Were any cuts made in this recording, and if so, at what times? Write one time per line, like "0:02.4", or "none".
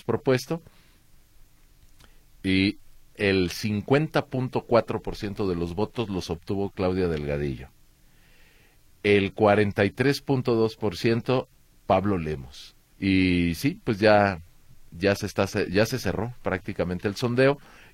0:12.9